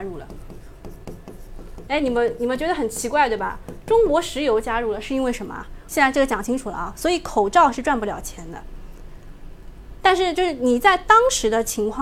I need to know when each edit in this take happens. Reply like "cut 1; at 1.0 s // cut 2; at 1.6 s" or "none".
cut 1; at 5.9 s